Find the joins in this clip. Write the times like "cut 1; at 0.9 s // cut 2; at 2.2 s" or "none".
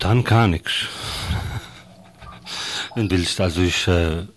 cut 1; at 3.1 s